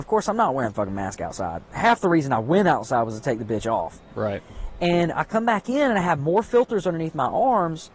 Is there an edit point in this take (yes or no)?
no